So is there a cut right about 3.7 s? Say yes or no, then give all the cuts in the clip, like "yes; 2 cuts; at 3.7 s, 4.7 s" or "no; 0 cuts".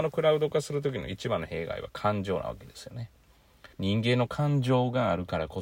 yes; 1 cut; at 3.7 s